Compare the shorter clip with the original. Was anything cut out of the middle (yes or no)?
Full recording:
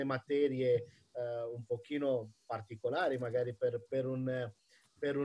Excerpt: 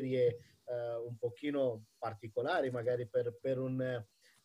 no